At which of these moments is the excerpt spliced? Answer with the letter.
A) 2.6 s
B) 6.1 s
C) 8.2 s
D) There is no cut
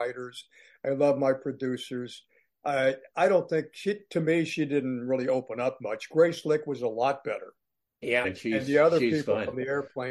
C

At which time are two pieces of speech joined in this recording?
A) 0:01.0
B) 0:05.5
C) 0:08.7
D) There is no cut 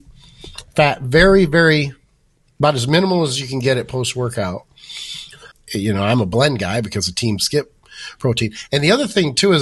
B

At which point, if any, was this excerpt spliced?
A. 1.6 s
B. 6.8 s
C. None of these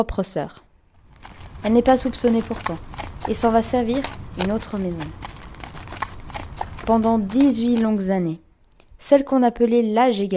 C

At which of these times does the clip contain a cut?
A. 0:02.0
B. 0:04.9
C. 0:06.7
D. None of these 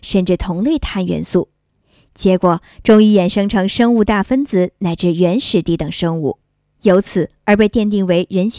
C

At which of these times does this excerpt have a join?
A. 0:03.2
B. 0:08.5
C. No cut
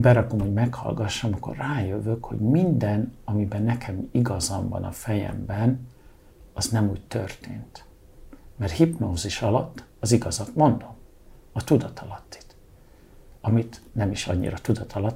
C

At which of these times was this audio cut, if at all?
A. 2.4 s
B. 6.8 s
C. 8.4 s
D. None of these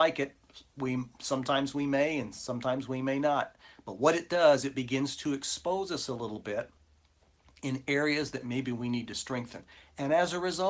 D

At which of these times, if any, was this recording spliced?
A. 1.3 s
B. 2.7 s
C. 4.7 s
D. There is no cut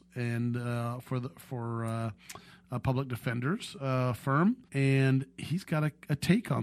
C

